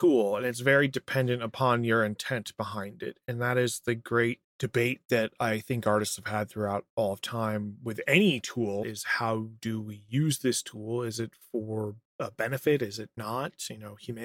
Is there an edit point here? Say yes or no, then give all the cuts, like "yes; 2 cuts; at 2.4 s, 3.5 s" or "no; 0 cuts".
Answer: yes; 1 cut; at 8.8 s